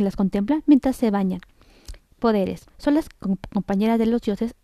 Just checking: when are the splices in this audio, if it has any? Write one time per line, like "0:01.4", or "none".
0:02.7